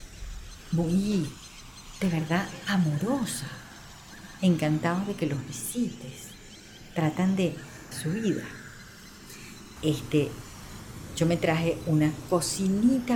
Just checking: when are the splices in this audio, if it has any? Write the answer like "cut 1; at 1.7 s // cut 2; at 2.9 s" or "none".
cut 1; at 4.4 s // cut 2; at 7.9 s // cut 3; at 9.8 s